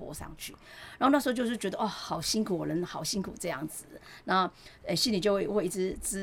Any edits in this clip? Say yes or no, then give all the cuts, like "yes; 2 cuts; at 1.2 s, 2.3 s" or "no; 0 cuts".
no; 0 cuts